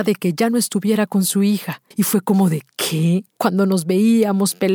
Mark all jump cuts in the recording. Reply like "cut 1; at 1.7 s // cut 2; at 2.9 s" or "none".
cut 1; at 1.9 s // cut 2; at 3.4 s